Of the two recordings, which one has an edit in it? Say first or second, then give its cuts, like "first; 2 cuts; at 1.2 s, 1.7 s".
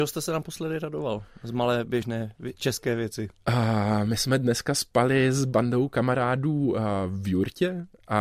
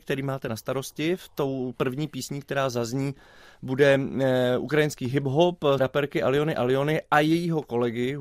second; 1 cut; at 5.8 s